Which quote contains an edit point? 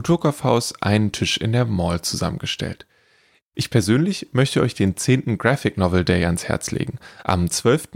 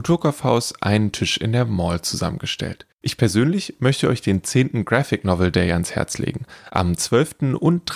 second; 1 cut; at 2.9 s

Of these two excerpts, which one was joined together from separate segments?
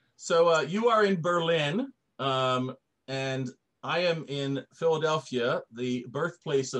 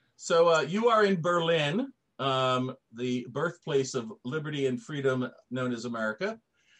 second; 1 cut; at 2.9 s

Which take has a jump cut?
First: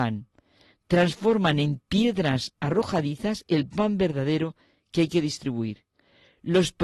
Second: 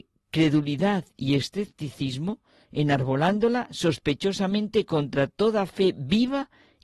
second; 1 cut; at 2.6 s

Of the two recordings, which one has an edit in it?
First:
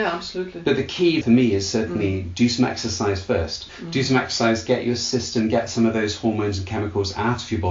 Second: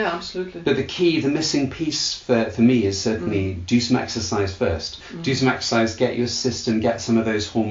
first; 1 cut; at 1.2 s

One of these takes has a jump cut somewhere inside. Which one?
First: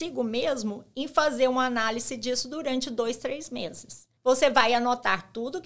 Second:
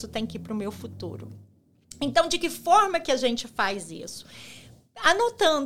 first; 1 cut; at 4.2 s

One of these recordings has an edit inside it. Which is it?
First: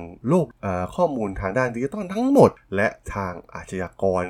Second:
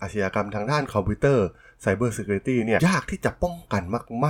second; 1 cut; at 2.8 s

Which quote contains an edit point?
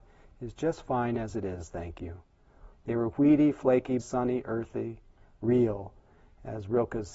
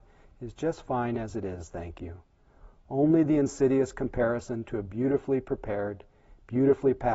first; 2 cuts; at 2.7 s, 4.0 s

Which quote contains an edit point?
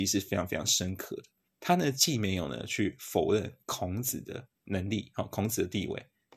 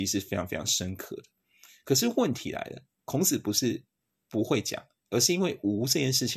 first; 2 cuts; at 1.5 s, 4.6 s

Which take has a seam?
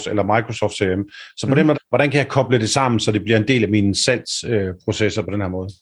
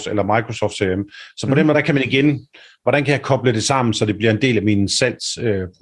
first; 1 cut; at 1.7 s

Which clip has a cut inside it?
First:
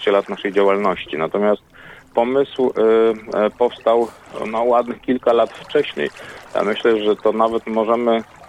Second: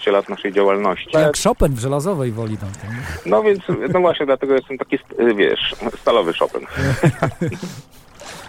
second; 1 cut; at 1.1 s

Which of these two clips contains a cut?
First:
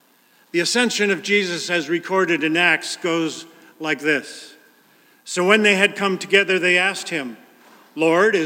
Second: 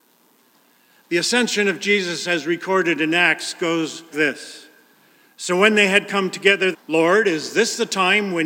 second; 2 cuts; at 4.1 s, 6.7 s

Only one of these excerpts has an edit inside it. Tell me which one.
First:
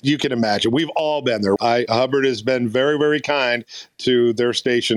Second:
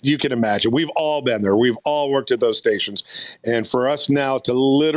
first; 1 cut; at 1.6 s

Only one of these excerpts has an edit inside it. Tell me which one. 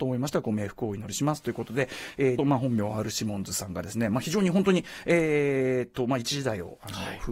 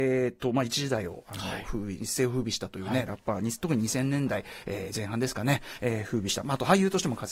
first; 1 cut; at 2.4 s

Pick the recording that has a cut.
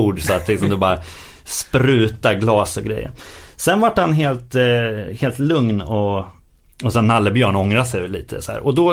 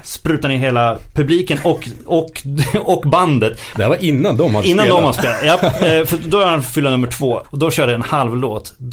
second; 2 cuts; at 3.7 s, 7.4 s

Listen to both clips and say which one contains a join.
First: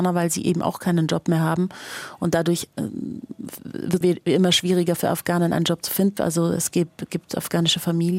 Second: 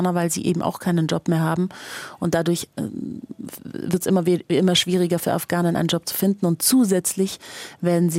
first; 2 cuts; at 4.0 s, 6.2 s

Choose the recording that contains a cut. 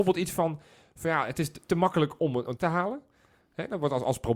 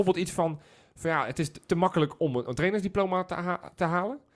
first; 1 cut; at 2.6 s

